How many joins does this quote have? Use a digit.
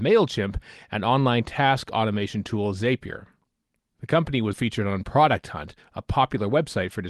1